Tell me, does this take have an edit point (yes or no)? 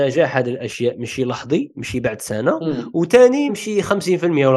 yes